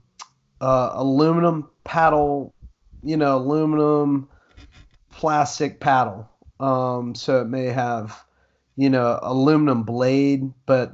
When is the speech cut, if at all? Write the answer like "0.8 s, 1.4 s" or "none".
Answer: none